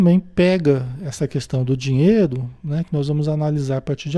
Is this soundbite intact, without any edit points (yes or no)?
yes